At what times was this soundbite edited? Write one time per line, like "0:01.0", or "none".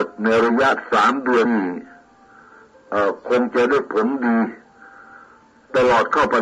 0:01.5